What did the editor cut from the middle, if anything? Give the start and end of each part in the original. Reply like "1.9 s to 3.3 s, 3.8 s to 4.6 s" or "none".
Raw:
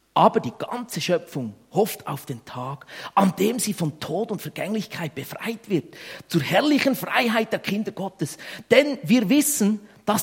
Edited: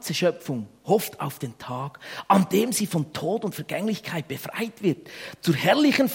none